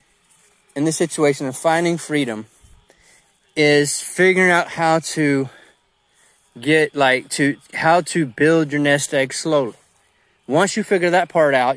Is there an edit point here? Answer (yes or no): no